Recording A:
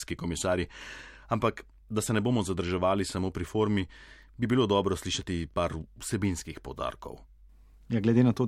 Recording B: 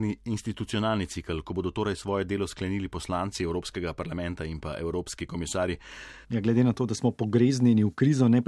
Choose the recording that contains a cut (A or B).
B